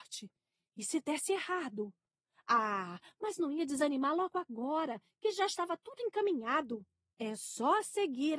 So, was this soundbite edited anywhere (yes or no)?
yes